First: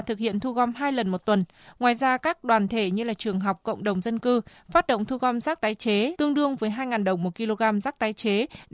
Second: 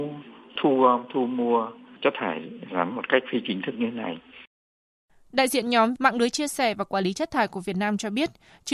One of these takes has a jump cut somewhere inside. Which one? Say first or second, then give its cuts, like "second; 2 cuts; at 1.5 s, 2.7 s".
first; 1 cut; at 6.2 s